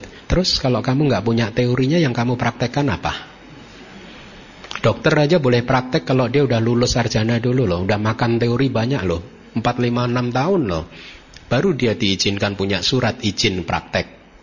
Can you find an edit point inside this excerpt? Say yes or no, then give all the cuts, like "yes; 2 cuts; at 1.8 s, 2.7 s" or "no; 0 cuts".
no; 0 cuts